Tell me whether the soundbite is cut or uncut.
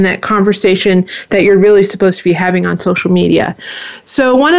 uncut